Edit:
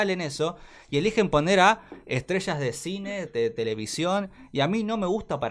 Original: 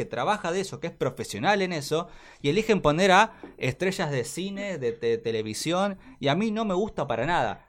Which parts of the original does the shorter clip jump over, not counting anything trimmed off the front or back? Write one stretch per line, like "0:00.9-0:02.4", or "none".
0:04.8-0:04.9